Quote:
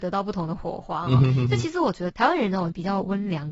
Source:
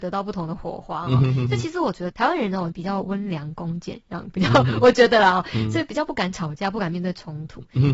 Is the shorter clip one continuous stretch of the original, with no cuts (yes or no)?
yes